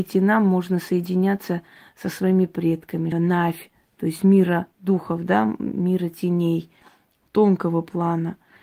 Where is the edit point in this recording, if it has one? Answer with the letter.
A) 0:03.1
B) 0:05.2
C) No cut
A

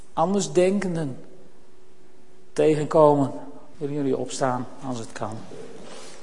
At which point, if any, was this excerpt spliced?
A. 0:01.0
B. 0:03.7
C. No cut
B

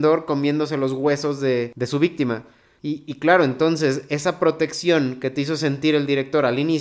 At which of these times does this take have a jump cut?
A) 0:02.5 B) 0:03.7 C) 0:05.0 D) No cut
D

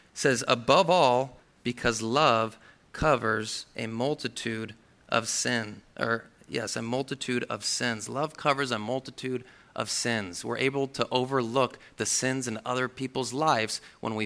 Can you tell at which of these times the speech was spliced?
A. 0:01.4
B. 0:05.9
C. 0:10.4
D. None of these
A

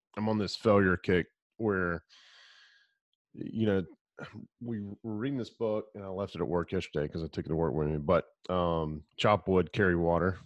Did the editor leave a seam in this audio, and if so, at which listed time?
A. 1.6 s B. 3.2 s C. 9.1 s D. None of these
C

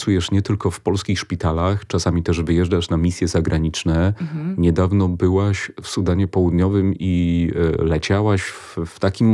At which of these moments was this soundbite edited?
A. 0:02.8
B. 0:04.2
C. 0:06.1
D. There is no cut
D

